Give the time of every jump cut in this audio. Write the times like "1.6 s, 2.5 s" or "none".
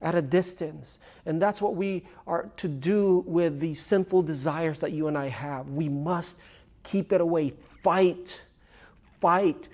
none